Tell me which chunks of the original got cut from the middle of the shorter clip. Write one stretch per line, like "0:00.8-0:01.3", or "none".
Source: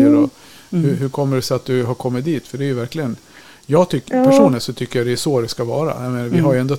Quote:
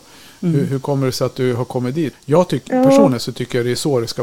0:02.4-0:03.5